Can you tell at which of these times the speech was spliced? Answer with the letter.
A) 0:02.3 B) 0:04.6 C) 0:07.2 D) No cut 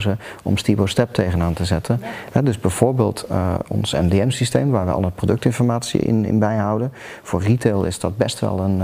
A